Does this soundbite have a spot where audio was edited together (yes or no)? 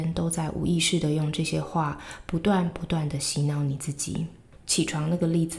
yes